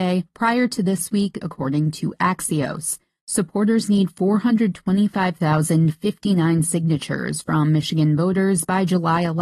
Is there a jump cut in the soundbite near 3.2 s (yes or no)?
yes